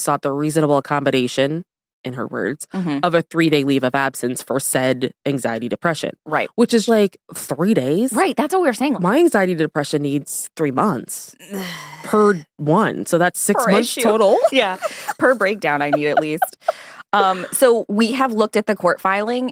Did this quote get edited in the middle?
yes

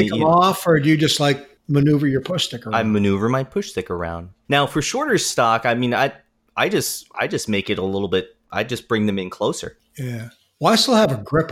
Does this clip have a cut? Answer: no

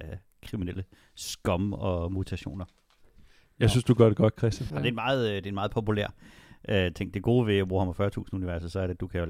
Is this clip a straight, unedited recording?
no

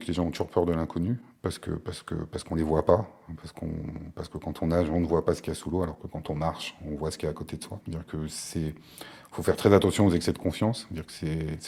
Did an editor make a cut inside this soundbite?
yes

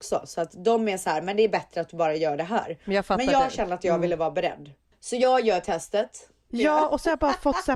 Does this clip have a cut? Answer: yes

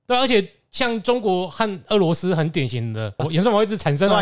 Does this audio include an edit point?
yes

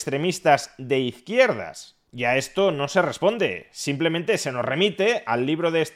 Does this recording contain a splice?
no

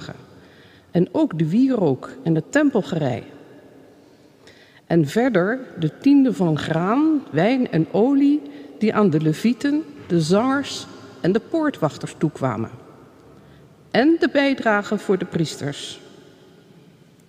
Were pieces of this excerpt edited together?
no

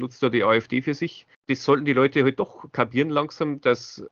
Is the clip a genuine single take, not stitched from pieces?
no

